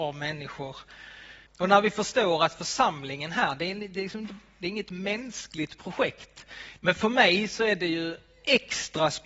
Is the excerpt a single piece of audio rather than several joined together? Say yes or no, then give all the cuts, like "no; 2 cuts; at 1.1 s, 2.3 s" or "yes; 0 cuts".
no; 2 cuts; at 1.5 s, 6.8 s